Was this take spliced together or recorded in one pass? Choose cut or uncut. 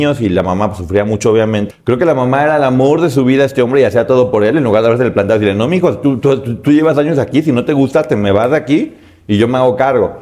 cut